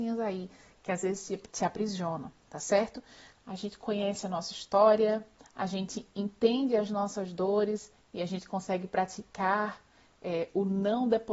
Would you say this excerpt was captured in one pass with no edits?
no; 1 cut; at 3.4 s

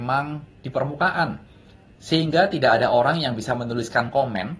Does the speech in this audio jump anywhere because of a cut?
yes; 1 cut; at 1.9 s

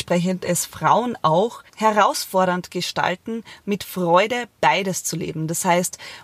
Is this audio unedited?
no; 1 cut; at 1.7 s

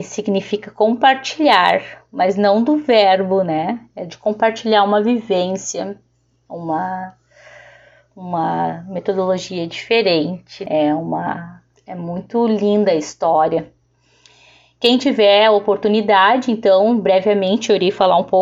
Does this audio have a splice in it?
no; 0 cuts

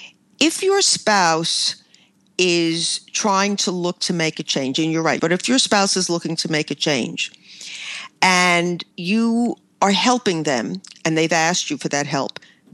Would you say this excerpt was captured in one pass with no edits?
no; 2 cuts; at 5.2 s, 8.9 s

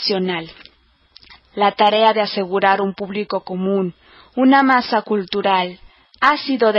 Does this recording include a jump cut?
yes; 1 cut; at 1.4 s

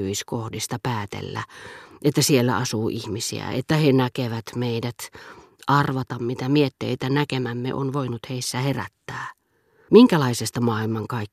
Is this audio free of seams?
no; 1 cut; at 9.9 s

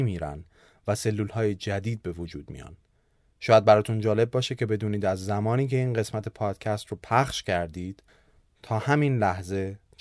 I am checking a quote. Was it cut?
no; 0 cuts

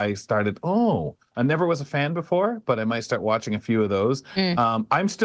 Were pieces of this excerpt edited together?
yes; 1 cut; at 1.3 s

